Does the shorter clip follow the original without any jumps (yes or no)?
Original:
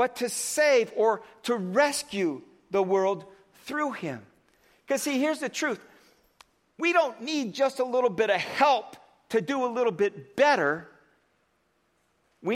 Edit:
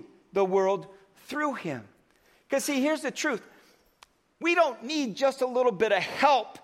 yes